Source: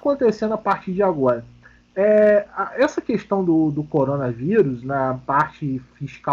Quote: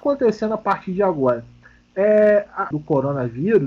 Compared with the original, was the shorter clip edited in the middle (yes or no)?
yes